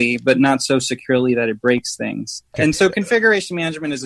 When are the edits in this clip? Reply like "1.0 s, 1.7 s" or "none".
2.5 s